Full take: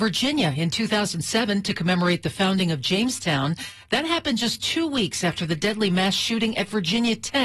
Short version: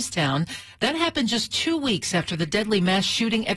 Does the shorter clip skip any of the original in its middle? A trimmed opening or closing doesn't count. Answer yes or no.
no